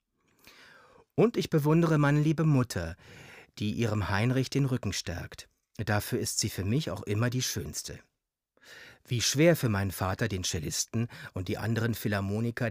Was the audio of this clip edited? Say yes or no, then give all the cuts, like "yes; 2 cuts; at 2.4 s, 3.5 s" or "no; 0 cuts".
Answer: no; 0 cuts